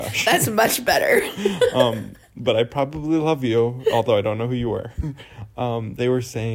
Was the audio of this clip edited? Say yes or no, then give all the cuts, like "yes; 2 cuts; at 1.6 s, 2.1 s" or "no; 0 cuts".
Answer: no; 0 cuts